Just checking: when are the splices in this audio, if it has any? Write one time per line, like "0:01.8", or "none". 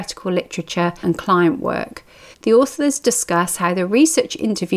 0:01.0
0:02.3

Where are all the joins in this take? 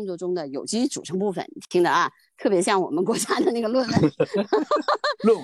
none

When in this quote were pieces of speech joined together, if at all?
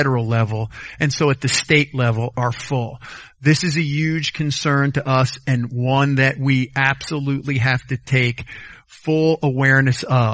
0:02.3

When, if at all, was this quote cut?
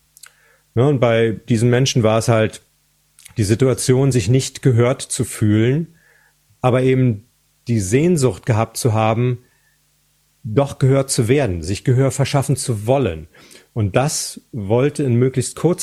none

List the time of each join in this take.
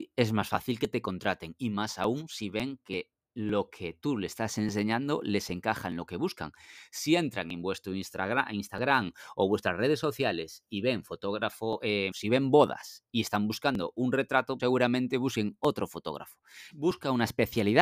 0:12.1
0:14.6
0:16.7

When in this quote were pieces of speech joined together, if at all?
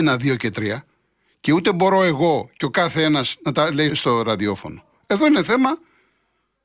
0:03.9

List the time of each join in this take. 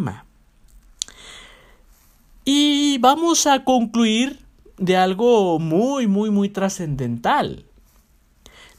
none

